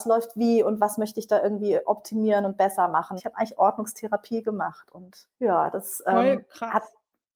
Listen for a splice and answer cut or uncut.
cut